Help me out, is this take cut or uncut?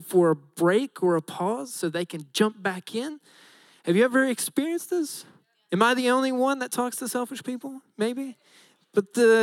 uncut